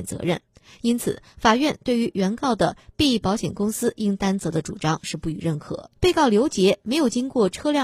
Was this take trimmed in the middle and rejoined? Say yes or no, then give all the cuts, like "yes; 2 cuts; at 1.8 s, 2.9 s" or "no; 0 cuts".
yes; 1 cut; at 6.0 s